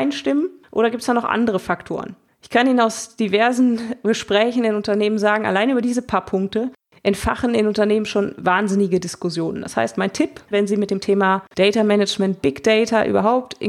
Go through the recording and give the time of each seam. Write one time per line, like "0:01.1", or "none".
0:10.5